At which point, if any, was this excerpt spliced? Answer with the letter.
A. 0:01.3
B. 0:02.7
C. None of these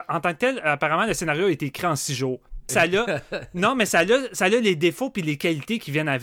B